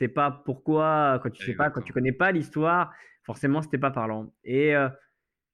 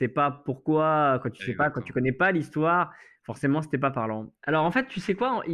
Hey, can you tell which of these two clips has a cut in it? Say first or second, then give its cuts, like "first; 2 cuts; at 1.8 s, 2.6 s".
second; 1 cut; at 4.4 s